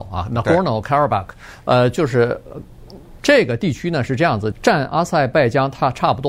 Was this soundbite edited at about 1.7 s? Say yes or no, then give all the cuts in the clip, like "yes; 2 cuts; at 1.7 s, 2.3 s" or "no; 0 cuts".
no; 2 cuts; at 3.2 s, 4.5 s